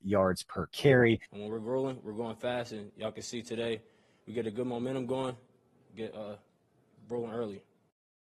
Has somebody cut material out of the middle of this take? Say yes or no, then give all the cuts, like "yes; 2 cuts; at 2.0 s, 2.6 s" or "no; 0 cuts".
yes; 1 cut; at 1.3 s